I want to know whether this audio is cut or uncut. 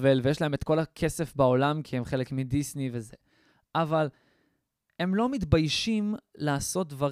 uncut